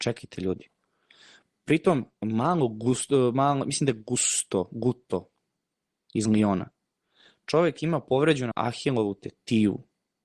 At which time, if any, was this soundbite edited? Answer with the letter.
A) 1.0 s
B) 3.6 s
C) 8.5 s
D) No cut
C